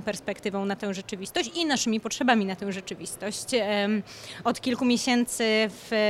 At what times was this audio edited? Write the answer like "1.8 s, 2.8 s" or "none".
none

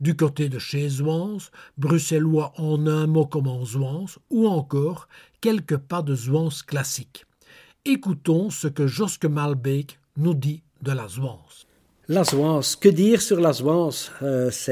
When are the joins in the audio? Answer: none

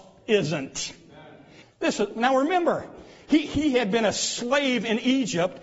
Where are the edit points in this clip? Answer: 1.6 s, 3.5 s

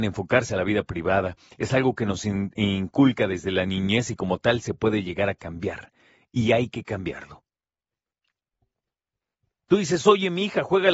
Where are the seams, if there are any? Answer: none

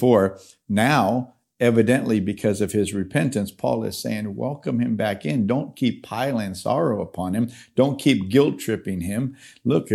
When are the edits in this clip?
none

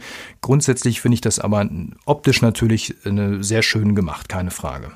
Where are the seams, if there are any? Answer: none

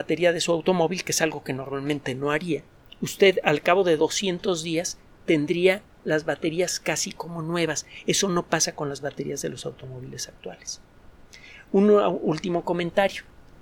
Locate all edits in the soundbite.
none

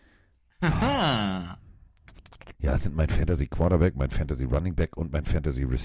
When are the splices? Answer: 2.5 s

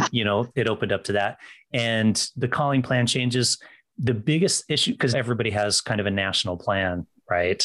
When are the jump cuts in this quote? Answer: 5.1 s

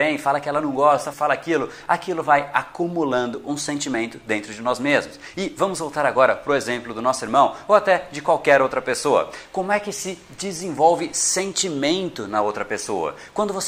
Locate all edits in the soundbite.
1.1 s, 5.3 s

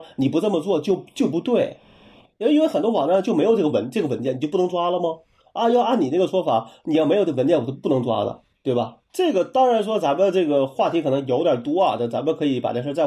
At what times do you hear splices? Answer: none

